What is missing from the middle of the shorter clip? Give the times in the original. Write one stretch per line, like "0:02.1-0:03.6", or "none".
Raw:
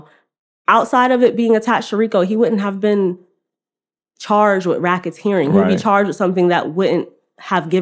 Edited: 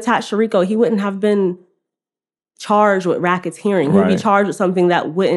none